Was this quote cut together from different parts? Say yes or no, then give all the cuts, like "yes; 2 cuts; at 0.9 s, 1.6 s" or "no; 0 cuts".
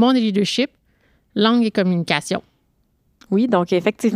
no; 0 cuts